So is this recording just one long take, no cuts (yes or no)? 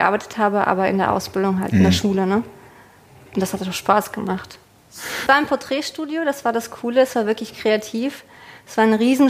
no